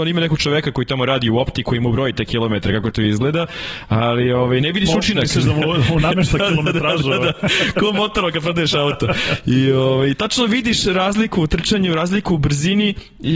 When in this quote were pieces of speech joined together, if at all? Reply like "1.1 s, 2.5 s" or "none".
none